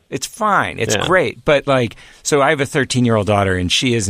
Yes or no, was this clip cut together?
no